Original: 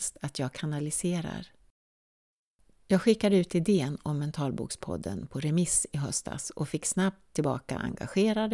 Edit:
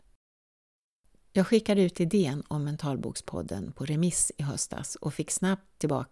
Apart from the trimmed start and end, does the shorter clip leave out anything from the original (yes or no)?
no